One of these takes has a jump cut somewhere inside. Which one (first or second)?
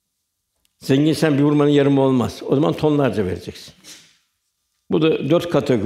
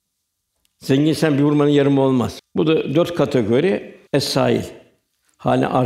second